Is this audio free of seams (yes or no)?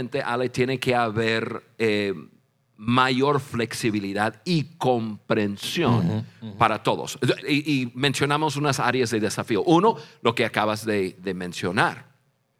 no